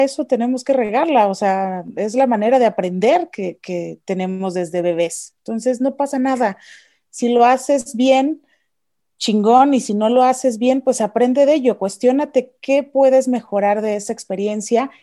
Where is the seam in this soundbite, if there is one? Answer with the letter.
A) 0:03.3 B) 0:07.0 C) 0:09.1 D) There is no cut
D